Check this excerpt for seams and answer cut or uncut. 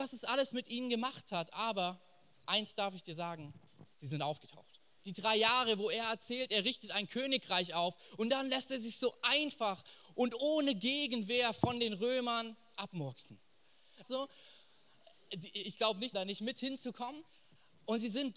cut